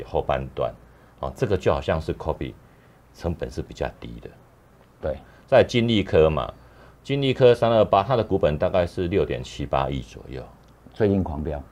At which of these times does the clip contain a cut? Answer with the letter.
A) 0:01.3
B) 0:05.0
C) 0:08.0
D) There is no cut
B